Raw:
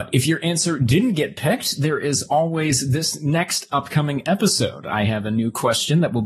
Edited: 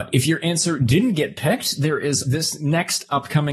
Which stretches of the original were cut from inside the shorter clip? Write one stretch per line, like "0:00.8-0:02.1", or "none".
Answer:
0:02.2-0:02.9